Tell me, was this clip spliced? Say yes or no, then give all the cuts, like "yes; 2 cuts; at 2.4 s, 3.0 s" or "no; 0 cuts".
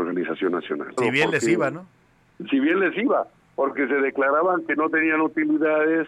yes; 1 cut; at 1.0 s